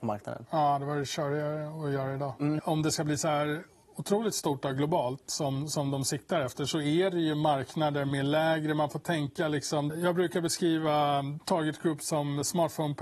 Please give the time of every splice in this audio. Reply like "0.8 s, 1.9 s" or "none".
2.6 s, 9.9 s